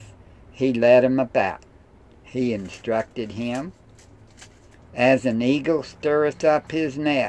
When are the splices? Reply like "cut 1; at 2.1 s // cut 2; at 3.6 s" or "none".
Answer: cut 1; at 4.8 s

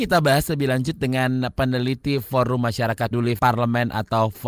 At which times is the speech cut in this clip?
cut 1; at 3.1 s

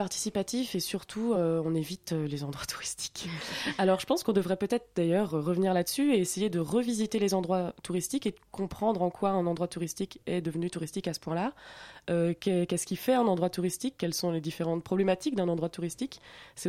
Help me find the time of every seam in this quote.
none

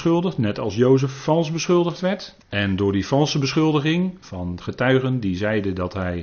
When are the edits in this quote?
cut 1; at 2.4 s

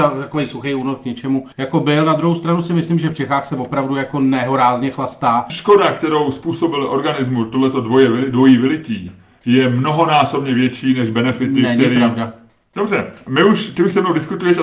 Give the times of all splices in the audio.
cut 1; at 1.5 s // cut 2; at 5.5 s

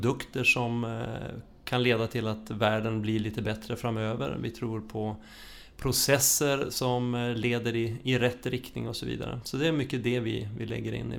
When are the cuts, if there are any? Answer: none

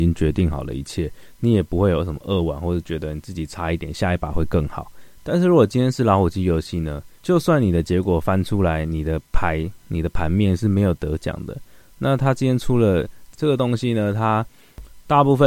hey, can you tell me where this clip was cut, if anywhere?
cut 1; at 7.2 s // cut 2; at 13.3 s

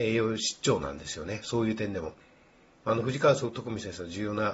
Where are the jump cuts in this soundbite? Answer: none

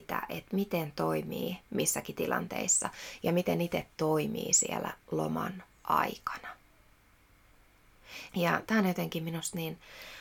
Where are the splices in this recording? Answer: cut 1; at 8.3 s

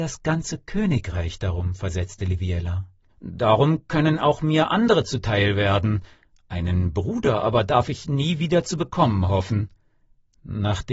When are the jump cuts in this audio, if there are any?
cut 1; at 3.1 s

